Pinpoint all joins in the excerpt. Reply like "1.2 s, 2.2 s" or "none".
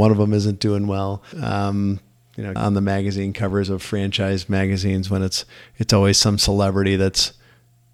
1.3 s, 2.6 s